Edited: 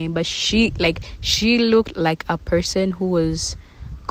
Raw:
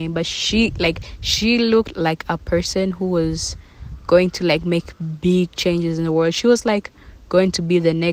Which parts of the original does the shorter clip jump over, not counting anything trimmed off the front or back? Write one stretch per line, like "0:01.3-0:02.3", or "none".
none